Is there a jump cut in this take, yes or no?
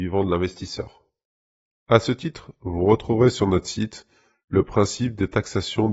no